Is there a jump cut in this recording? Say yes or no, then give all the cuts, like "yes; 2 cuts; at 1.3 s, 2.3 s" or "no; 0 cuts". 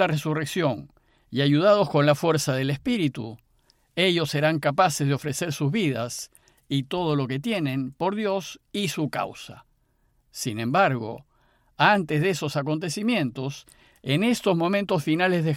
no; 0 cuts